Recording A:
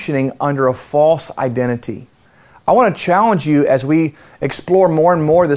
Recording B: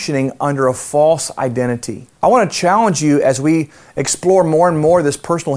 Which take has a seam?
B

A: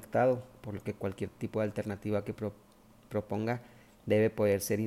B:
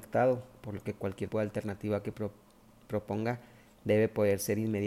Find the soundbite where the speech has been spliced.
B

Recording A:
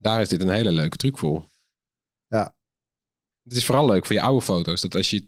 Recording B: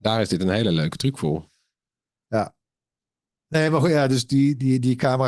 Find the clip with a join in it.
A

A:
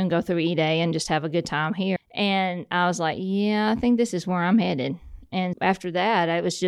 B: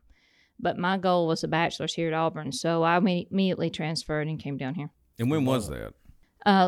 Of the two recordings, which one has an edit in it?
A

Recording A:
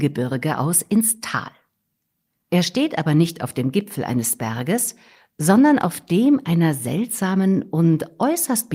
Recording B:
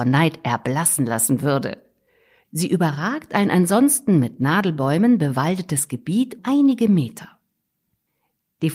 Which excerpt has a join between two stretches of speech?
B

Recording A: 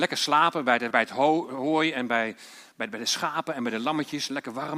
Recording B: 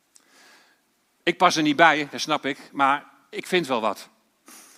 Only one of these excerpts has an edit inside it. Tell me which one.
A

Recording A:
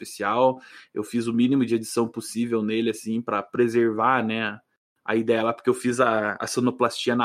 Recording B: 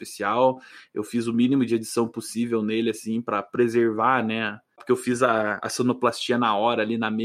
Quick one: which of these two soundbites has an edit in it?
B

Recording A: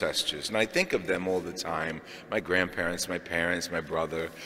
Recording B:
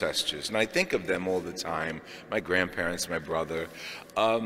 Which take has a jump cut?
B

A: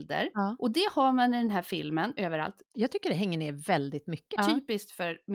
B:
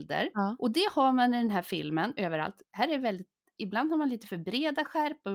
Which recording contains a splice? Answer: A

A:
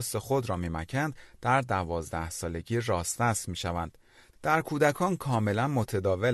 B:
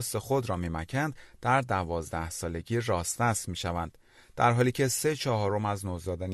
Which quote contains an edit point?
A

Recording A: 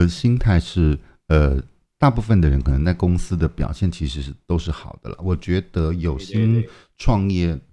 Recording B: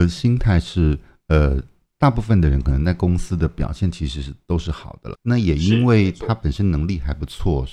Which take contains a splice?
B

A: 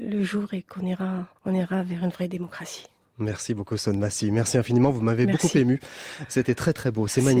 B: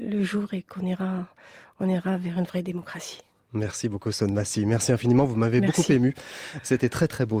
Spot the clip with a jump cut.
A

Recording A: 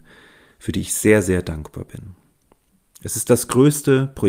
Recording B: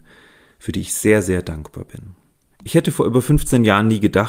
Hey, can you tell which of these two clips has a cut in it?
B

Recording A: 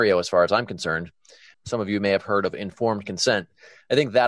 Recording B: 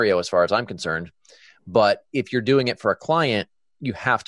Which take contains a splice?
A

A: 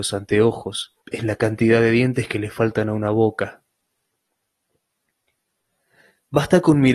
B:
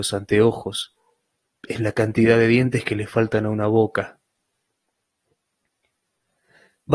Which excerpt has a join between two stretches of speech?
A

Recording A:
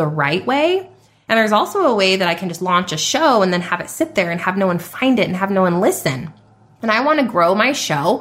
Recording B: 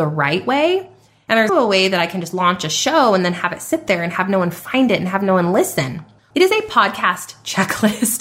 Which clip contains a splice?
B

